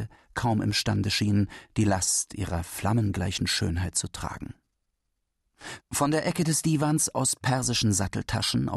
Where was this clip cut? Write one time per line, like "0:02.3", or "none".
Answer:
0:05.8